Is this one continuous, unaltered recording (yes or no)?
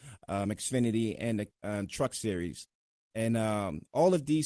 yes